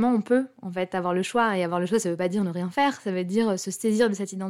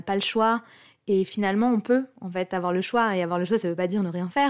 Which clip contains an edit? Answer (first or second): second